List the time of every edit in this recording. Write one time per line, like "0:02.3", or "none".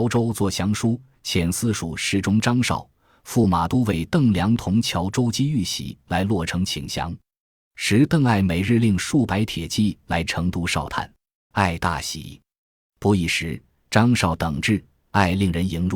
0:11.5